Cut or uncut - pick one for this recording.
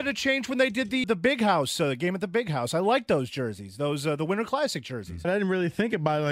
cut